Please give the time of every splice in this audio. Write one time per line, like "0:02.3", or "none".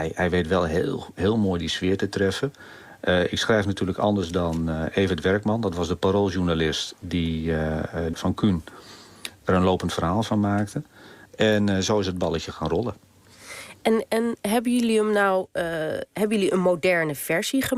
0:08.1
0:11.3